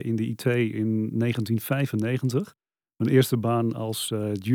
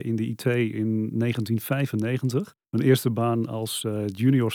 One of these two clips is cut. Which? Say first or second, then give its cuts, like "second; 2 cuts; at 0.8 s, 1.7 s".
second; 1 cut; at 2.6 s